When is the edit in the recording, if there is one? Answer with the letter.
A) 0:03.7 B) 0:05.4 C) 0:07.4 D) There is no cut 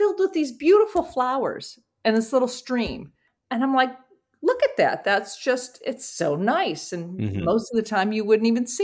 D